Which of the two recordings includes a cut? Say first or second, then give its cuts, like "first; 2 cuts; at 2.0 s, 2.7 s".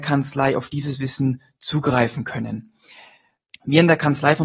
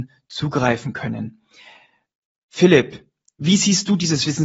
first; 1 cut; at 3.5 s